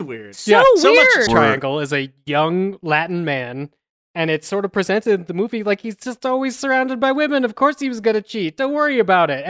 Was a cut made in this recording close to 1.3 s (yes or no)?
yes